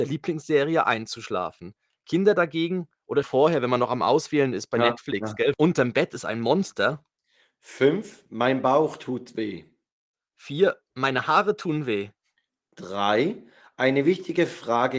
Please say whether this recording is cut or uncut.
cut